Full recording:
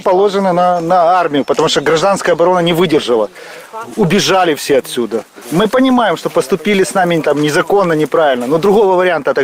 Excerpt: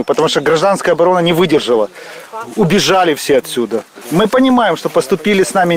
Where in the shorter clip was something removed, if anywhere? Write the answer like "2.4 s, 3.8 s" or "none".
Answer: none